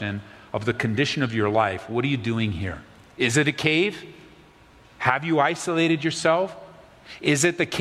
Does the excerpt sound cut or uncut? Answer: uncut